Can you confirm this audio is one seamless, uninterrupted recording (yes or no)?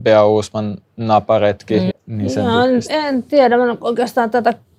no